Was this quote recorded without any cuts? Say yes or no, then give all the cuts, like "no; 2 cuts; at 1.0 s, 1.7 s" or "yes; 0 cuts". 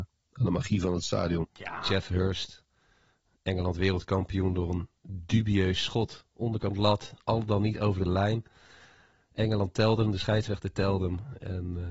no; 1 cut; at 1.4 s